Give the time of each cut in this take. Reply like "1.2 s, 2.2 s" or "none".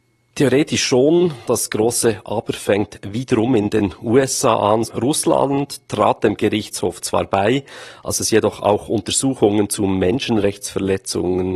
1.4 s, 4.8 s

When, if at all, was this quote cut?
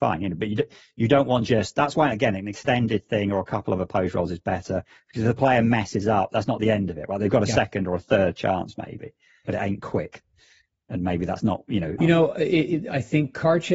9.4 s, 12.0 s

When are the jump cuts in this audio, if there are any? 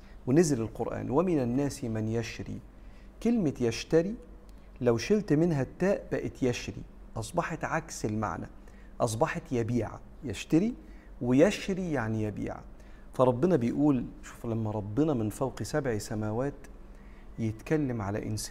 10.2 s

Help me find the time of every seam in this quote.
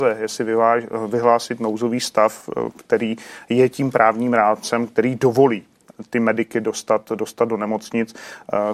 none

